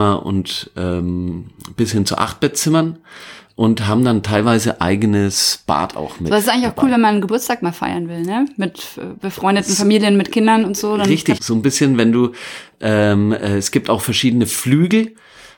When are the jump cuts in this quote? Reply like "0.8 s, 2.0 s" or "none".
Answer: 11.4 s